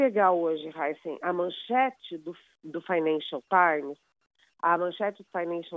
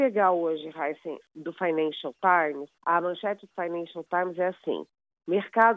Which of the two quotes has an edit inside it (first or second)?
second